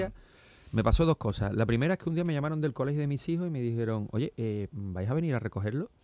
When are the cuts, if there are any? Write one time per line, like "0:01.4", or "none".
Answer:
0:04.7

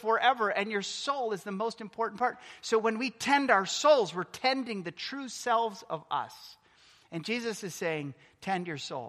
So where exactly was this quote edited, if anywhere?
none

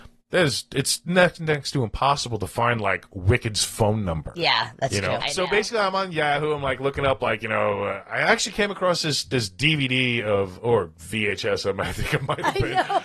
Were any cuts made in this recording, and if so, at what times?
0:05.2

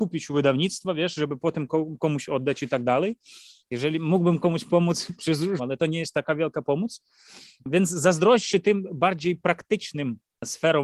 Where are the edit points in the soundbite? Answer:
0:03.6
0:05.6

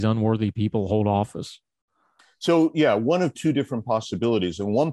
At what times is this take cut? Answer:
none

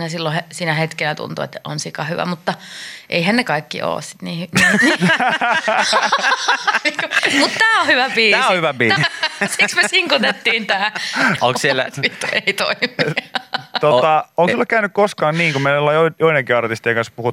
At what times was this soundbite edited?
0:09.0
0:11.4

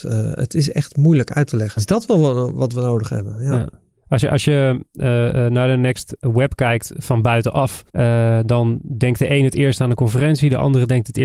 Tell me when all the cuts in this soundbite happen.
0:01.8
0:07.9

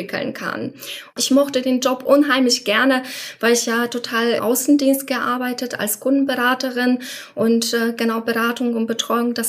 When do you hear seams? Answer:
0:01.1
0:04.4

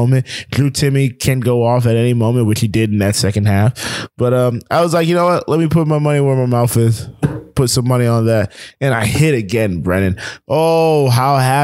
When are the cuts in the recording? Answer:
none

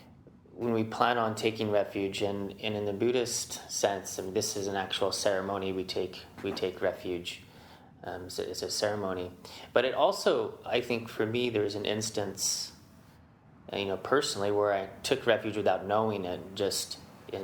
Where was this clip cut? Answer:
none

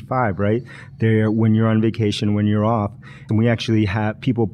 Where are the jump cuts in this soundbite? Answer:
0:03.3

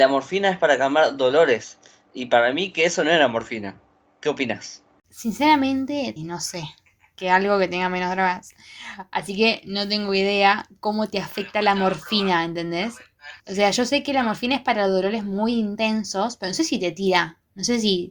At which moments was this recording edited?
0:06.2
0:13.4

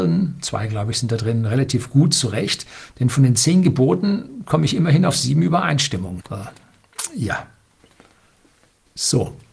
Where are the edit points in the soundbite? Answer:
0:06.2

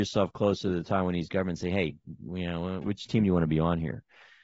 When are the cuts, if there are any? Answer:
0:02.8

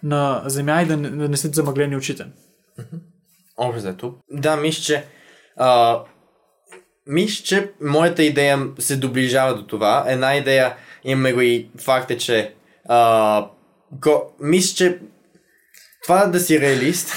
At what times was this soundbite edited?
0:04.2

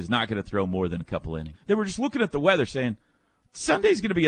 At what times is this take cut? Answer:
0:01.5

